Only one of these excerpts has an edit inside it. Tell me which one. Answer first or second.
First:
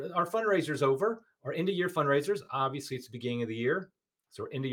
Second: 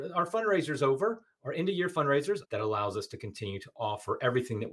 second